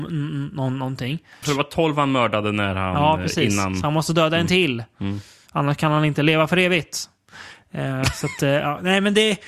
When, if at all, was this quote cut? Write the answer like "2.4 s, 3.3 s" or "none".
1.4 s

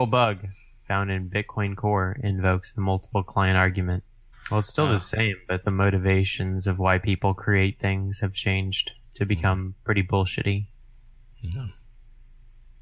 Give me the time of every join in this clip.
4.3 s, 5.6 s

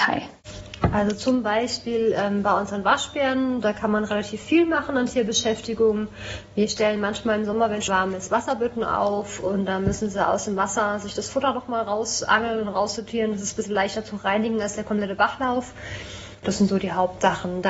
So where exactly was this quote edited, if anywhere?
7.9 s, 16.4 s

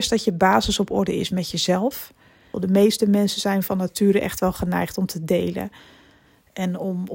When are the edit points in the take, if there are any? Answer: 2.5 s

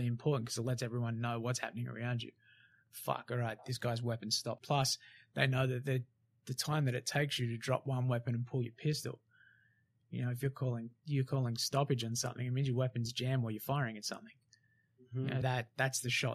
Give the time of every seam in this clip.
4.6 s, 15.4 s

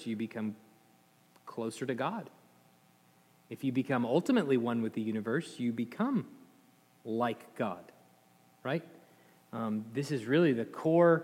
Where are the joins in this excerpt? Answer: none

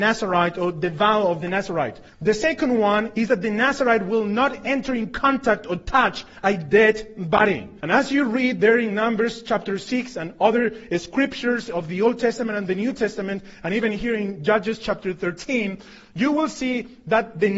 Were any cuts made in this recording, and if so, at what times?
2.1 s, 7.8 s

